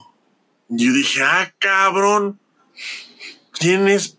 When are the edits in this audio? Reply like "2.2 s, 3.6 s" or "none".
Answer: none